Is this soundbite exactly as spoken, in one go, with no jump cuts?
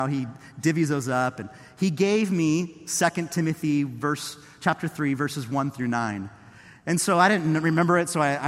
yes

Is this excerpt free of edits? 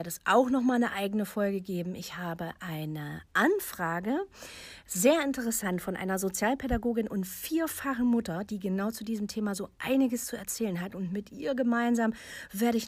yes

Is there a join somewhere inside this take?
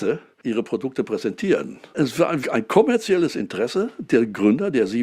yes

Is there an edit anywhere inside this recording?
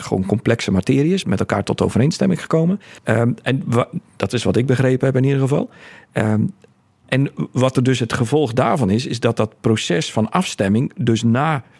yes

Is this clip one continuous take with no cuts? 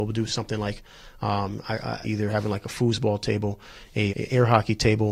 no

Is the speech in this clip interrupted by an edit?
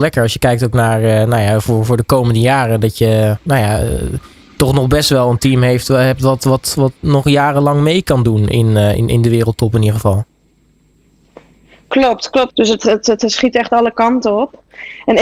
yes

